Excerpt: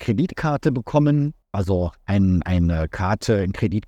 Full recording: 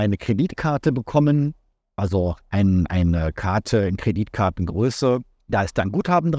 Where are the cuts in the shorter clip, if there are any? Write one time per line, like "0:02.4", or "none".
0:01.4